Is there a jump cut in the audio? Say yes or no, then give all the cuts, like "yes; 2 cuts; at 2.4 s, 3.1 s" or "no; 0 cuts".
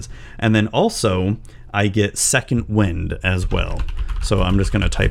no; 0 cuts